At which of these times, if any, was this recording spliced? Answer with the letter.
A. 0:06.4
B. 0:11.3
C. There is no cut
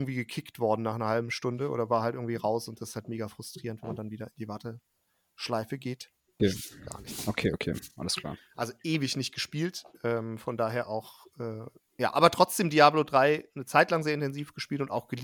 A